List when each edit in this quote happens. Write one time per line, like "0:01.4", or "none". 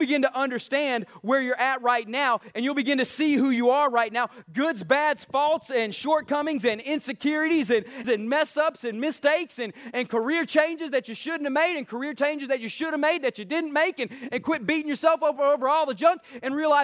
0:08.0